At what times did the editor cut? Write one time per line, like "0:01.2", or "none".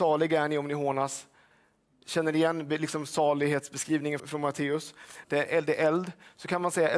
0:04.2
0:05.2